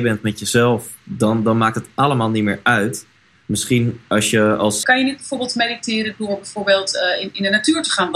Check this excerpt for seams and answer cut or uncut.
cut